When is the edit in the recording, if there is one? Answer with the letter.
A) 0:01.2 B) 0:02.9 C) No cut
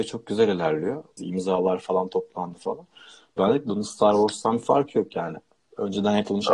A